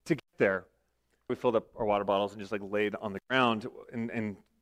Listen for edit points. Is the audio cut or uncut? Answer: cut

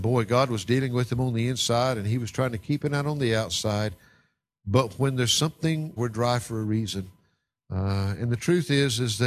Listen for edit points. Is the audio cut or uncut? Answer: cut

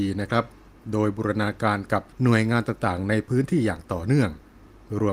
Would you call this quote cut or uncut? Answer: cut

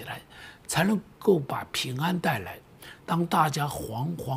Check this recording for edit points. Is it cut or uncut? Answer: cut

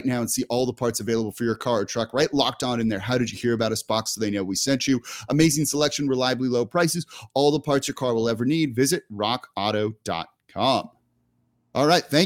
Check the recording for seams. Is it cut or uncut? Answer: uncut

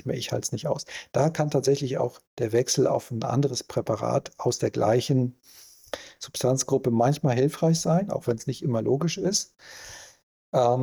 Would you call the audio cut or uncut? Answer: uncut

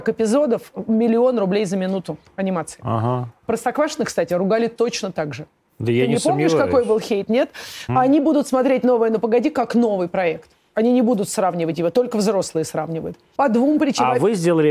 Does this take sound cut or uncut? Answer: cut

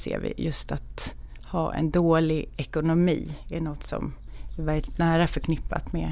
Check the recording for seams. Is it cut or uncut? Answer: uncut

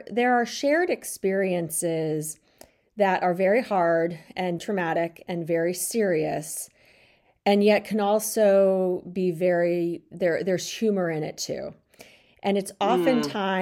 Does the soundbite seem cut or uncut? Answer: cut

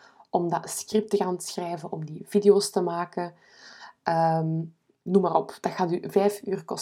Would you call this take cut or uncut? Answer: uncut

